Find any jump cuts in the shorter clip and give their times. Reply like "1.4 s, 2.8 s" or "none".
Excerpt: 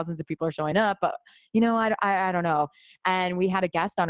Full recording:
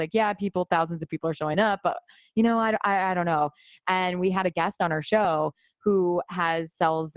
none